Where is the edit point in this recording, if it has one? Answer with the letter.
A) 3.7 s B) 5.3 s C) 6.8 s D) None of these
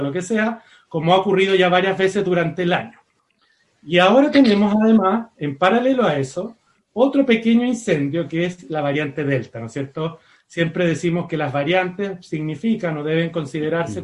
D